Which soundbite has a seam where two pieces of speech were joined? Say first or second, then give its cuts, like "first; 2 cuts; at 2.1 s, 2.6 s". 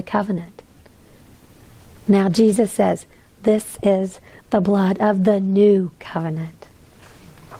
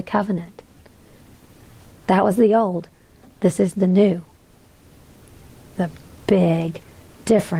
second; 1 cut; at 1.9 s